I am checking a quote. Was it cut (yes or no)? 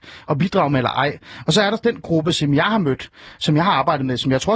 no